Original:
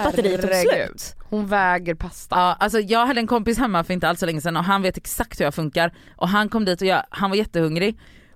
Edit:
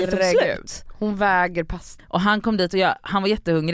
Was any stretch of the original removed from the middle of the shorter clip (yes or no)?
yes